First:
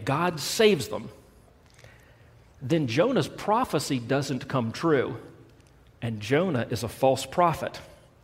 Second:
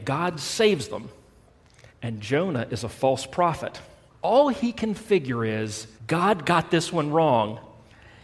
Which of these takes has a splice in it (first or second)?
second